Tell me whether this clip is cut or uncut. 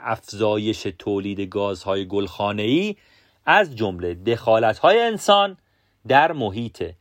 uncut